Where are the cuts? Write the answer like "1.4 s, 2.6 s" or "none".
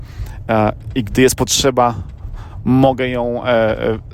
none